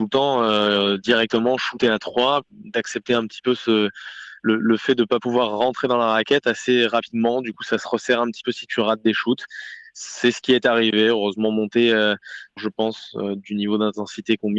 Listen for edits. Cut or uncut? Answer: cut